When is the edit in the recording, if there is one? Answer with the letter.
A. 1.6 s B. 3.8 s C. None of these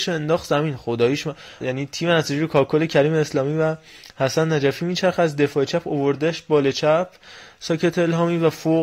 A